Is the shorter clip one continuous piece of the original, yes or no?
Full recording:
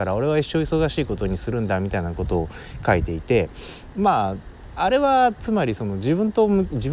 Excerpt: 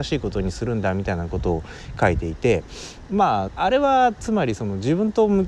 no